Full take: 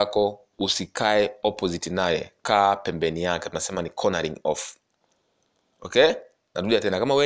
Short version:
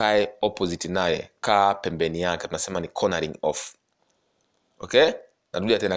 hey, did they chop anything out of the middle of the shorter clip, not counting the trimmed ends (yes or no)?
no